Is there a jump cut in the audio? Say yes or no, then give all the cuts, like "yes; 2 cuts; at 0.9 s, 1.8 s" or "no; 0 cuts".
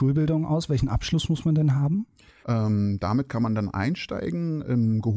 yes; 1 cut; at 2.4 s